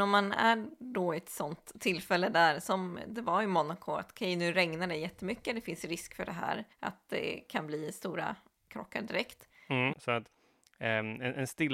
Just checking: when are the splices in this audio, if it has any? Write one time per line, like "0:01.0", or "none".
0:06.7
0:09.9